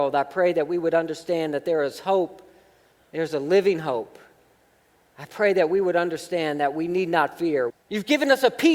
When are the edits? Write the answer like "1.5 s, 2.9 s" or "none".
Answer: 7.7 s